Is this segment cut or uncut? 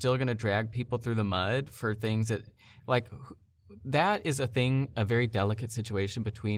uncut